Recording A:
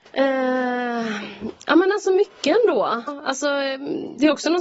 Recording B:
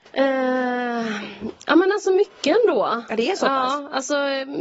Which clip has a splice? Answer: A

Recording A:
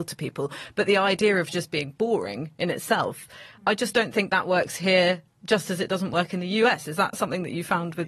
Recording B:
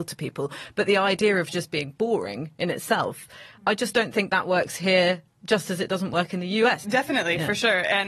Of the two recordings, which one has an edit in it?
B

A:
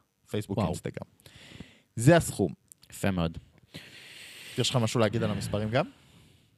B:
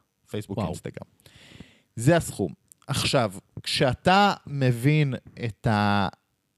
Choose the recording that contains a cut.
A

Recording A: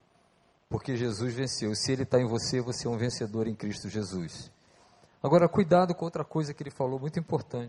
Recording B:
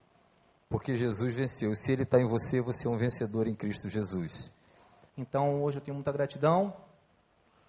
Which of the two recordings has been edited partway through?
B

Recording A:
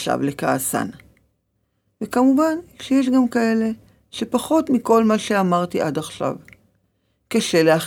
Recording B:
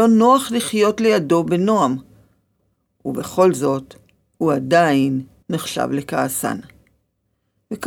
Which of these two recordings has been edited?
B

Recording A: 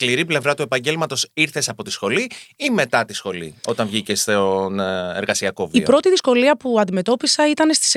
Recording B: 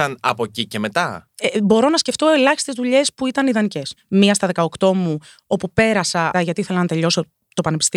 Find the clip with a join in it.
B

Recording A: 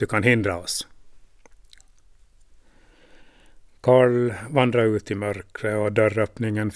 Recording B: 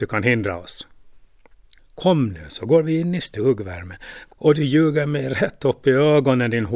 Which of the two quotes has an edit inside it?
B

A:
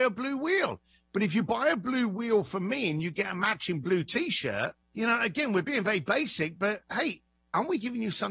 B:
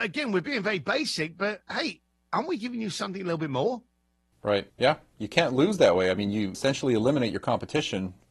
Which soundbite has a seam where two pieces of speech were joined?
A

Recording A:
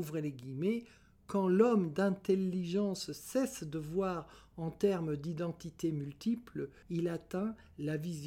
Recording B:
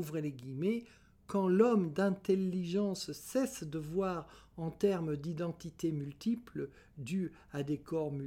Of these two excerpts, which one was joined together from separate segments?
A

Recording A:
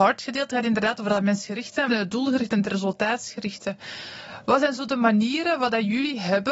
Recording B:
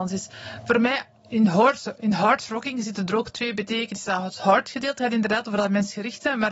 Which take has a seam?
A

